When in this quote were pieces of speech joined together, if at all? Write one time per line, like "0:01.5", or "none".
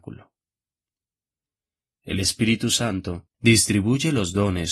0:01.9
0:03.3